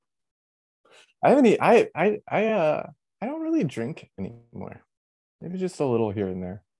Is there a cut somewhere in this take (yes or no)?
no